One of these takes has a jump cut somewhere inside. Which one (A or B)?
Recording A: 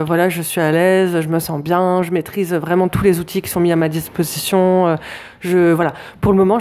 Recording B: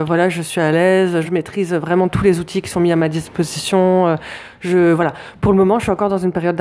B